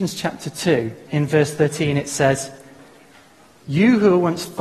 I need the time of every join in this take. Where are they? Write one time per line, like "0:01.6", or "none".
0:01.1
0:03.6